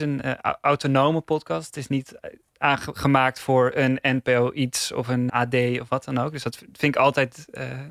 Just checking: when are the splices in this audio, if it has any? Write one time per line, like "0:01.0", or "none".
0:05.3

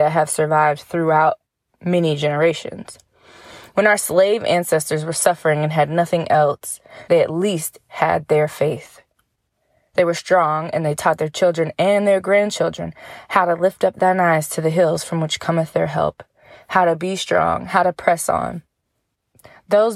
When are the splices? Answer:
0:07.1

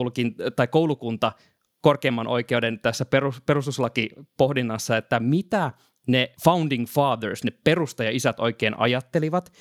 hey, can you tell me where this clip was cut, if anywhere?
0:06.3

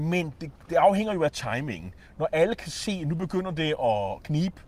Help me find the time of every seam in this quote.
none

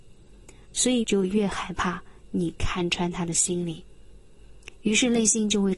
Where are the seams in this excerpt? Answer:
0:01.0

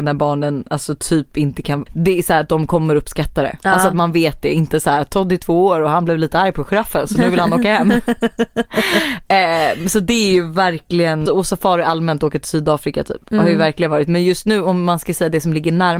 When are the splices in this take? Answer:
0:01.9
0:11.3

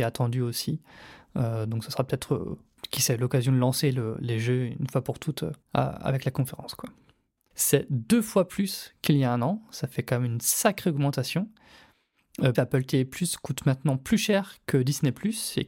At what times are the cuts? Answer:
0:05.6
0:07.5
0:12.5

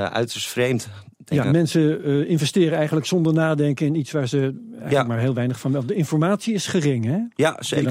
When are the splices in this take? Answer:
0:01.4

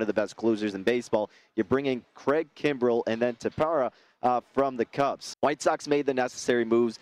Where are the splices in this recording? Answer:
0:05.3

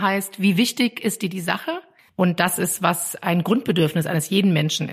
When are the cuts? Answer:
0:02.1

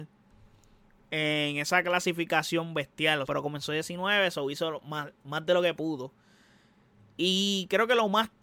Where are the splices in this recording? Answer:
0:03.2

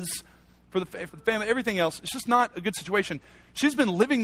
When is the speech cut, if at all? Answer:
0:01.1

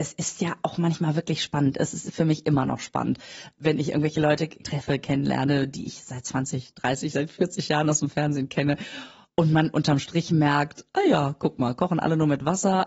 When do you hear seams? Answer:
none

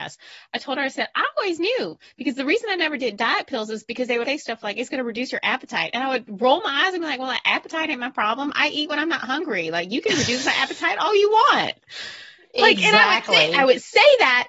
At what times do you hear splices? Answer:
0:04.2

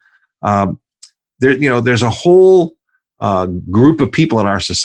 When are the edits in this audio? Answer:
none

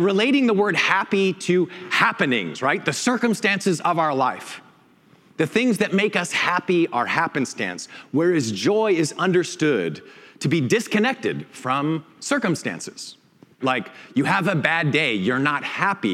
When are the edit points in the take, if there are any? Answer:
0:13.6

